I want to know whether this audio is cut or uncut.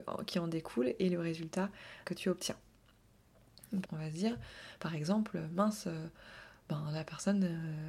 cut